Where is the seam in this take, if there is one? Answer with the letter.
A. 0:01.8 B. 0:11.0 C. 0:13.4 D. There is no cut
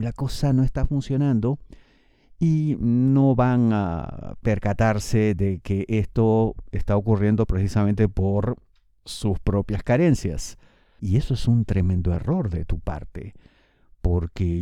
B